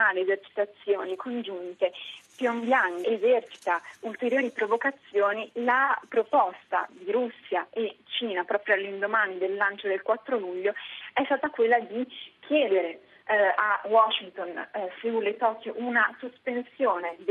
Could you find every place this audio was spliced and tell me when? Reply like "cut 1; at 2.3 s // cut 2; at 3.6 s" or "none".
cut 1; at 3.0 s